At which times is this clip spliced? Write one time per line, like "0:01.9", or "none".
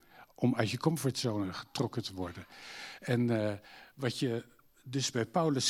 none